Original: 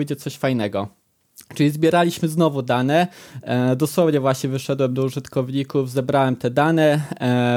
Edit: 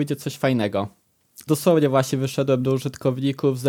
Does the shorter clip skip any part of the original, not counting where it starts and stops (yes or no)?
yes